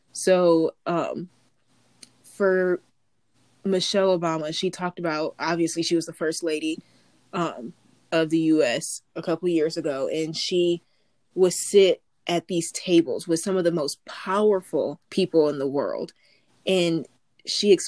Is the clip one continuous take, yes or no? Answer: no